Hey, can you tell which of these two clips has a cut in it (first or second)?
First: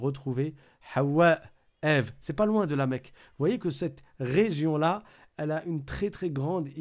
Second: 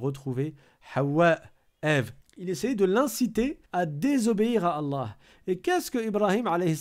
second